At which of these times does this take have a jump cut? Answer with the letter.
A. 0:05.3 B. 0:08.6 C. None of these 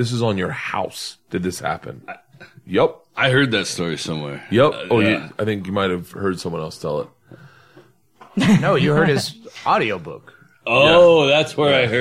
C